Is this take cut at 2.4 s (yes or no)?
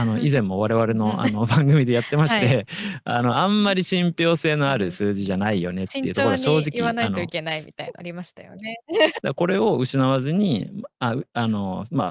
no